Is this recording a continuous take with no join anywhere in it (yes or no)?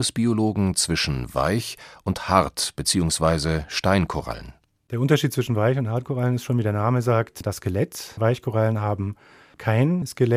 yes